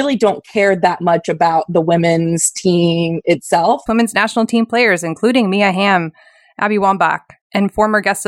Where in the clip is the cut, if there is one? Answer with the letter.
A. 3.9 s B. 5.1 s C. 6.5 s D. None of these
A